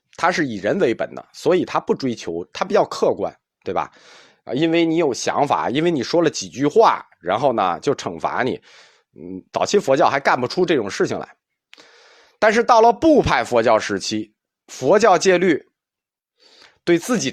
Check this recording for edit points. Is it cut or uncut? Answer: uncut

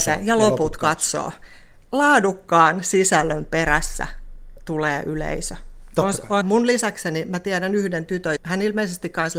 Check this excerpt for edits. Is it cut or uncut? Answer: cut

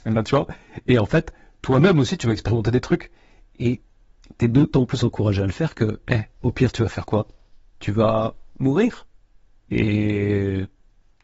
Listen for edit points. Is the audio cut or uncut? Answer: uncut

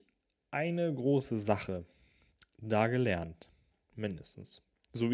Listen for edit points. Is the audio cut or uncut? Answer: cut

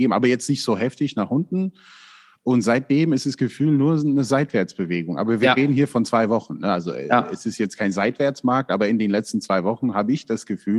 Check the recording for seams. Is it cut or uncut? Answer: uncut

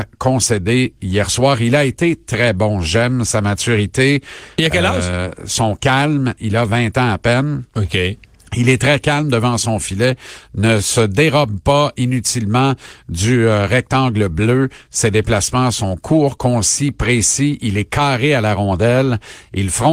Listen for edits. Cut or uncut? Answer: uncut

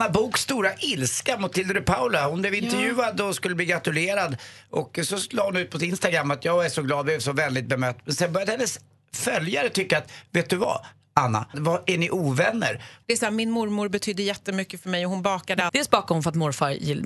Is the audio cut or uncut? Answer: cut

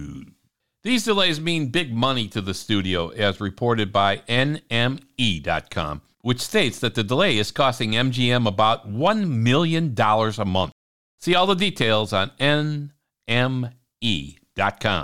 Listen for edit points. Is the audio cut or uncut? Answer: uncut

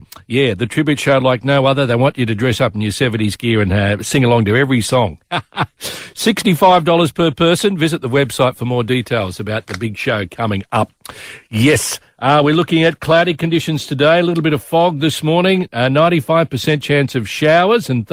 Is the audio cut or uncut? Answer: uncut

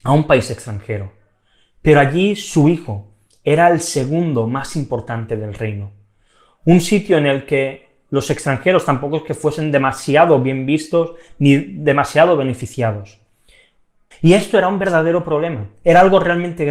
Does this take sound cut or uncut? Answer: cut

